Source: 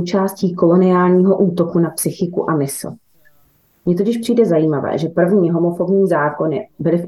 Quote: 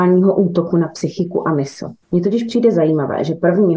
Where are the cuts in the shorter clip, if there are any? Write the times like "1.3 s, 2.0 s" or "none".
2.0 s